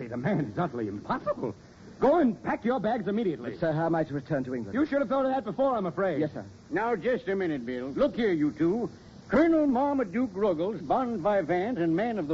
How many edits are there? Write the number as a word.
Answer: three